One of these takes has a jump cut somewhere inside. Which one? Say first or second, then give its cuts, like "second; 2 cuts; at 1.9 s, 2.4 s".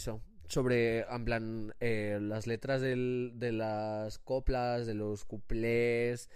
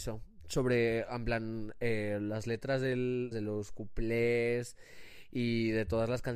second; 1 cut; at 3.3 s